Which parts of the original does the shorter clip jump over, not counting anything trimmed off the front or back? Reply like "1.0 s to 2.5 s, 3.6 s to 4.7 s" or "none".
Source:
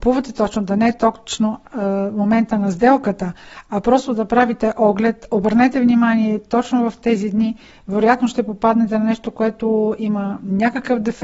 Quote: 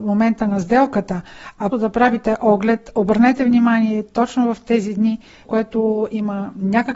3.8 s to 4.1 s, 7.8 s to 9.3 s